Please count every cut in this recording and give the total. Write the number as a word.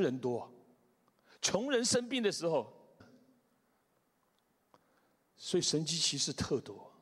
one